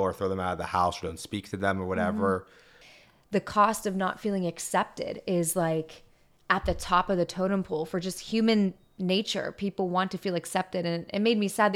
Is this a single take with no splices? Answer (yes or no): yes